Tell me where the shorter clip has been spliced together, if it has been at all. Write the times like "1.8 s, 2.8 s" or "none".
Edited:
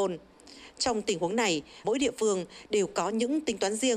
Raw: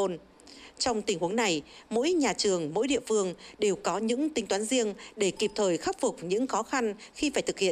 1.8 s